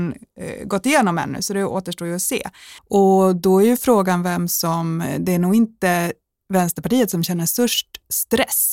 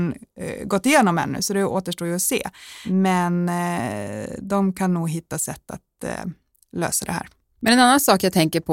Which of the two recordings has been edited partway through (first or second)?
first